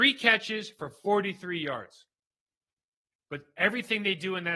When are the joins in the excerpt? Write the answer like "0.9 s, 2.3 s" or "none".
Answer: none